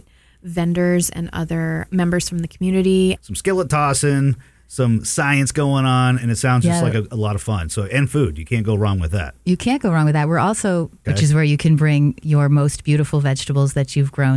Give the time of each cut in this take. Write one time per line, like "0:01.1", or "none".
0:01.9
0:03.2
0:11.0